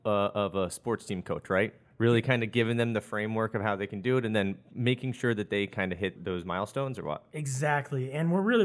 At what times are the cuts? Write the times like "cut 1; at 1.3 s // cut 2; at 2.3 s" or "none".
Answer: cut 1; at 6.2 s